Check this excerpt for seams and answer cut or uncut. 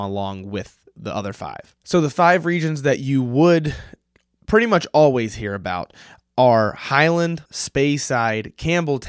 cut